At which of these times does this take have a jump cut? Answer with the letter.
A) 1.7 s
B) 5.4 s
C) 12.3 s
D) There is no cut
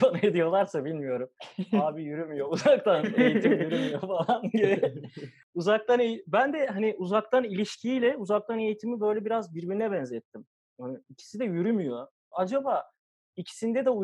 C